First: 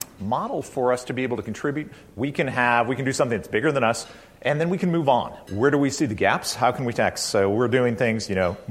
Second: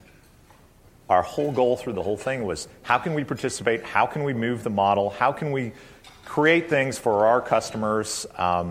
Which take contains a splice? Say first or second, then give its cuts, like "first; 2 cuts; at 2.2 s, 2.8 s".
first; 1 cut; at 5.5 s